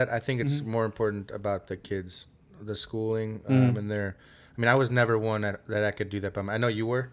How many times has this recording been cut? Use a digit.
0